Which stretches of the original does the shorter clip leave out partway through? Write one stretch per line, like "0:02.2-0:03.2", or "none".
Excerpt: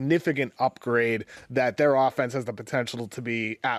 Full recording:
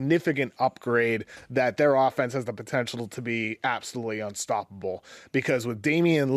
none

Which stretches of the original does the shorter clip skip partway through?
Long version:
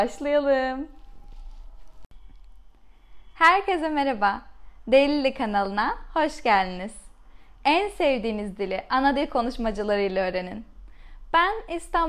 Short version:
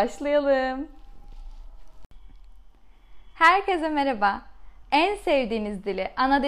0:04.8-0:07.6

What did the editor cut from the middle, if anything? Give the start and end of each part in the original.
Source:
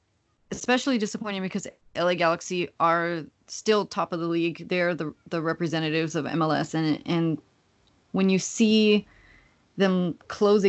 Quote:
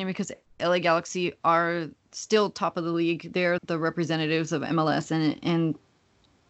0:04.9-0:05.2

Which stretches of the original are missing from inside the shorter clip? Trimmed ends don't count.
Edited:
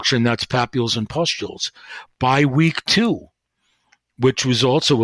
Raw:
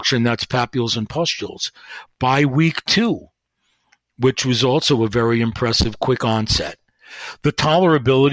none

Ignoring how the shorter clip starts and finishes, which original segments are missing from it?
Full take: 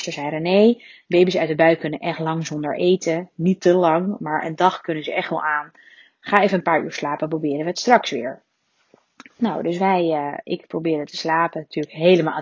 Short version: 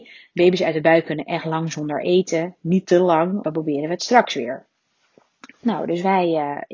0:04.2-0:07.2

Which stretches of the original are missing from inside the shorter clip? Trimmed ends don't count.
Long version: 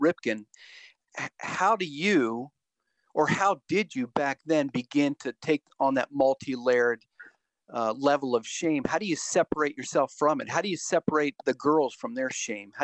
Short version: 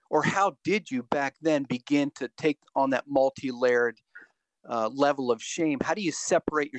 none

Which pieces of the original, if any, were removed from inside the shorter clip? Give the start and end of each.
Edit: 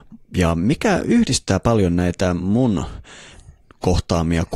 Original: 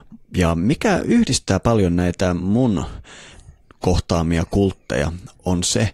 none

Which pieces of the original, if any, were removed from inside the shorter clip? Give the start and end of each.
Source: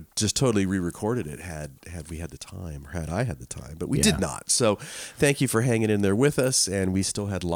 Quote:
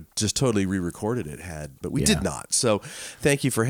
0:01.8-0:03.8

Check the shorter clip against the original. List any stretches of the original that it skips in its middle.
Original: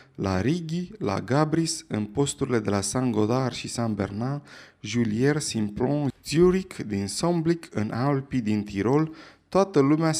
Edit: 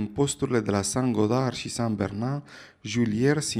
none

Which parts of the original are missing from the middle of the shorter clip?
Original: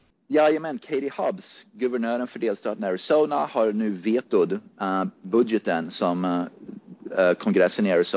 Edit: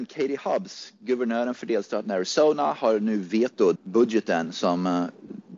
0:04.5-0:05.1

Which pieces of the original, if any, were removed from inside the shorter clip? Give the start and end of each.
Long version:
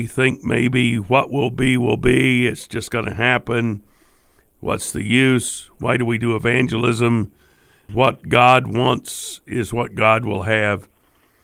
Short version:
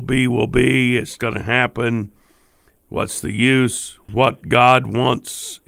0:02.7-0:02.9
0:05.8-0:07.8

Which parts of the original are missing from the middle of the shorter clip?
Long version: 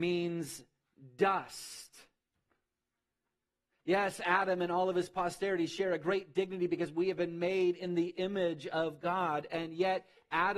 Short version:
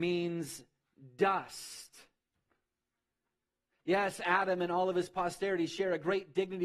none

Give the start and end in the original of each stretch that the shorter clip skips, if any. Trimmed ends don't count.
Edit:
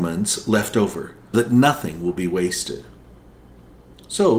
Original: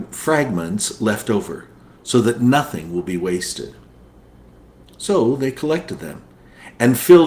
0:01.9-0:02.2

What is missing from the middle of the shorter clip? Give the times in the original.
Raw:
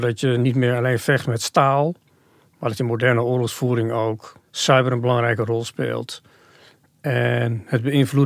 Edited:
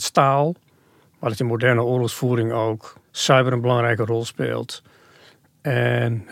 none

